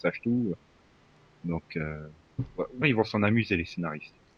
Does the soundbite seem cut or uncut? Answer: cut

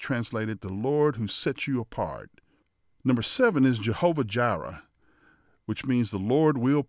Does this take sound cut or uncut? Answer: uncut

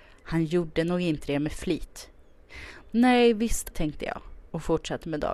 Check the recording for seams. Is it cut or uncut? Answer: cut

